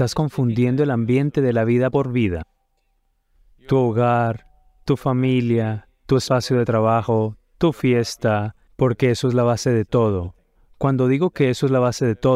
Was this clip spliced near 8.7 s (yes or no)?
yes